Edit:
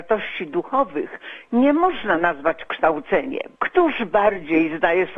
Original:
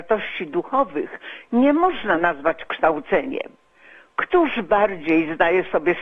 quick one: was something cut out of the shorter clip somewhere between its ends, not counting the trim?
yes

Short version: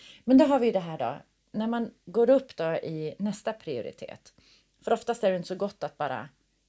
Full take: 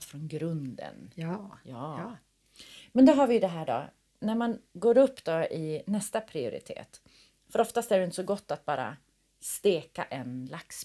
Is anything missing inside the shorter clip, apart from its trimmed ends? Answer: no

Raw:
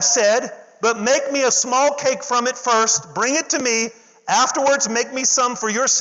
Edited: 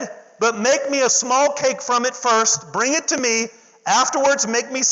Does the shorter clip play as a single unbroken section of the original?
yes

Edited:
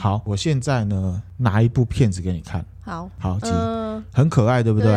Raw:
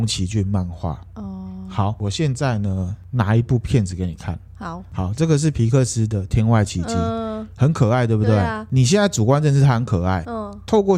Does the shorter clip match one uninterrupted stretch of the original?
no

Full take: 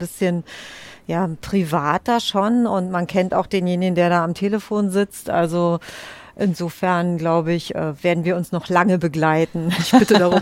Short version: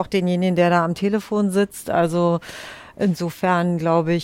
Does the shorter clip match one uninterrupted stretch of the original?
yes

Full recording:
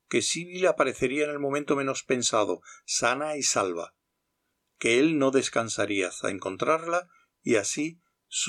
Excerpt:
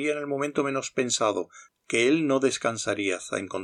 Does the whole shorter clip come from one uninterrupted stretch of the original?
no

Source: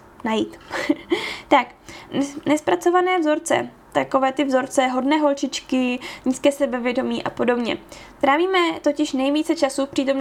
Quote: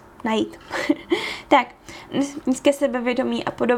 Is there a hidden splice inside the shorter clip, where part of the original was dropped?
yes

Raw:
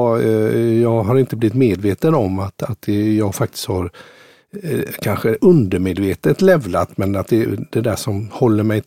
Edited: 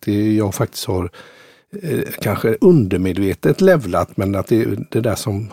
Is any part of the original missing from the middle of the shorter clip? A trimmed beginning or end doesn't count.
no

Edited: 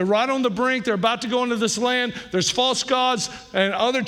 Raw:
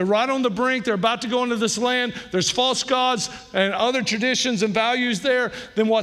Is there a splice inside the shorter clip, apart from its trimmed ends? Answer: no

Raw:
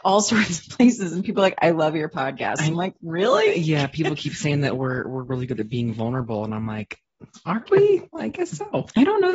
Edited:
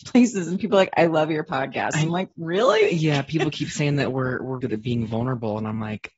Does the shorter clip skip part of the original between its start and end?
yes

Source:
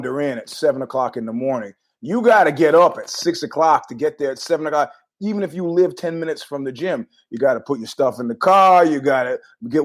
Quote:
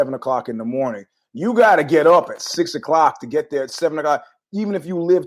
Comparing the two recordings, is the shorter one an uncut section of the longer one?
yes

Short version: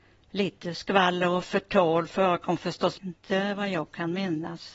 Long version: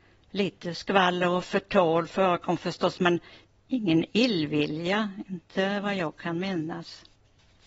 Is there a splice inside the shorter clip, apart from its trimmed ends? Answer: yes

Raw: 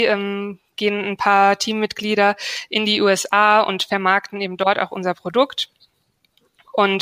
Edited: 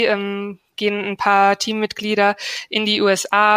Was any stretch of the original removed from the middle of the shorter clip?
no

